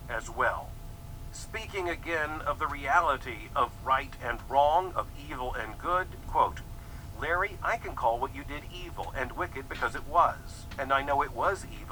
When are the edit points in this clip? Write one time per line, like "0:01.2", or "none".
0:06.2